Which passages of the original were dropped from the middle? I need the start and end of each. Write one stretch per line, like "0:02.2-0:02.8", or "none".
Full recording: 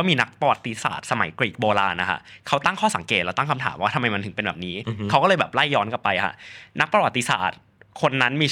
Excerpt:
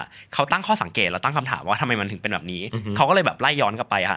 none